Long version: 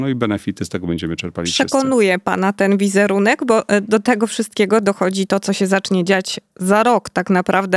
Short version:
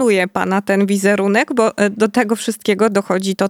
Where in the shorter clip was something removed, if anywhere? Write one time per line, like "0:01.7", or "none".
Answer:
none